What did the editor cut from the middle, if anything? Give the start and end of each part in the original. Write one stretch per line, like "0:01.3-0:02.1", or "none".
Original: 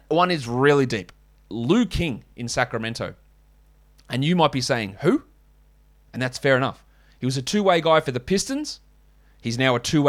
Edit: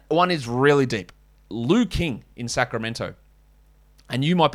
none